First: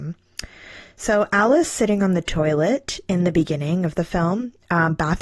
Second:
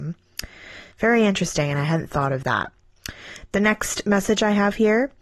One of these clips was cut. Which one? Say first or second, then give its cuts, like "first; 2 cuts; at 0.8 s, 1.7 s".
second; 1 cut; at 0.9 s